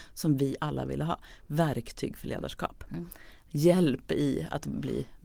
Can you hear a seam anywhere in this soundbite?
no; 0 cuts

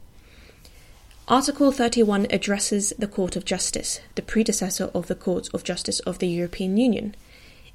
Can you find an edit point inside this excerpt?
no; 0 cuts

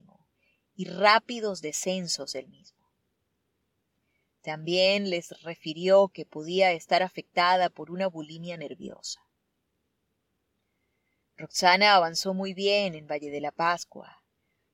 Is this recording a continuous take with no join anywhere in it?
yes; 0 cuts

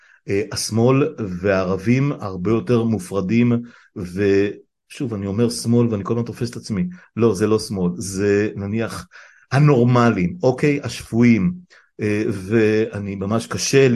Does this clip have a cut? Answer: no; 0 cuts

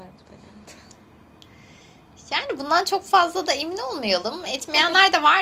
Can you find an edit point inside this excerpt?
no; 0 cuts

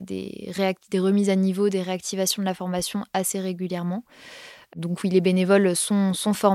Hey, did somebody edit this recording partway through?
no; 0 cuts

